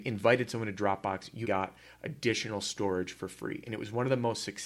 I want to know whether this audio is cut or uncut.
cut